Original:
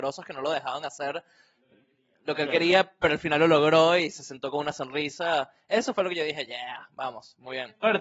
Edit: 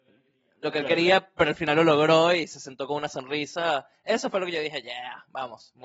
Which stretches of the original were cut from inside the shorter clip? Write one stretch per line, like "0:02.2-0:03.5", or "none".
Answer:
none